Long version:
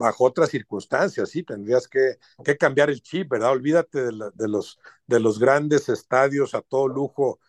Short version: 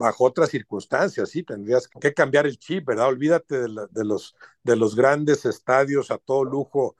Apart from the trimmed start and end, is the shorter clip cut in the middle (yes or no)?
yes